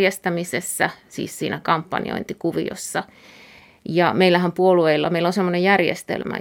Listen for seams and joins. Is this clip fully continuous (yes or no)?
yes